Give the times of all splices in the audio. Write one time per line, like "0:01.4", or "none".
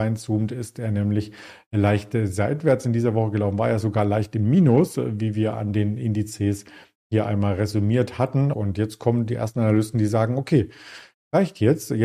0:08.5